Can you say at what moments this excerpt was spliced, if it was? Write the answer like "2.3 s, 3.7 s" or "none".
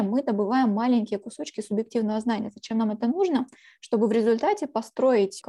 none